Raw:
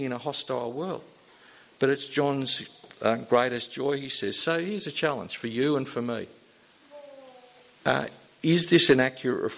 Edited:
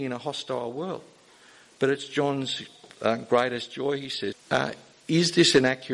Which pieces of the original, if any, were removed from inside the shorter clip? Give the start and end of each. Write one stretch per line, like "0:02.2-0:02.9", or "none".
0:04.3-0:07.7